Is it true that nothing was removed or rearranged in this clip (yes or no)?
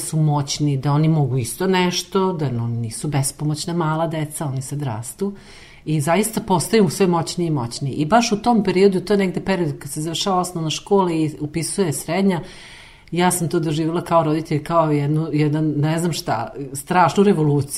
yes